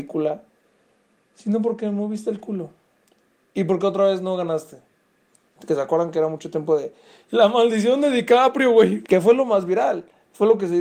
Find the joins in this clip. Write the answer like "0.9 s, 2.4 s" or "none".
5.4 s, 9.0 s